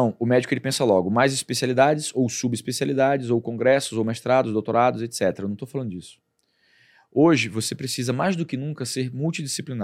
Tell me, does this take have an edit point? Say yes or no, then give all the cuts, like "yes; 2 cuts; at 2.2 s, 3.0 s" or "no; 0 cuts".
no; 0 cuts